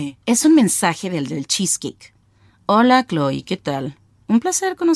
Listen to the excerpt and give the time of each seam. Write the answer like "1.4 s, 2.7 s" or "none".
none